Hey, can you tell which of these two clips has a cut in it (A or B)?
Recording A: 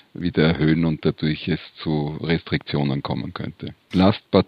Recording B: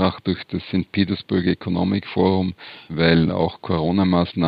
B